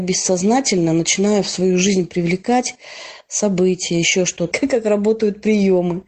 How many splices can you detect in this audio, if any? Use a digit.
1